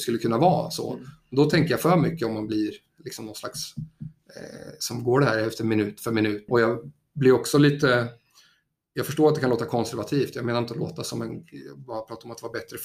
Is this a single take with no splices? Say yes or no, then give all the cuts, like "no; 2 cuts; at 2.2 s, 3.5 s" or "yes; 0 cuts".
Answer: no; 1 cut; at 6.5 s